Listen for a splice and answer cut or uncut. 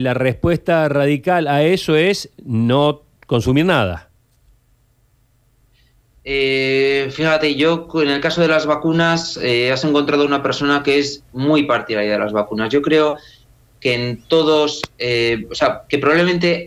uncut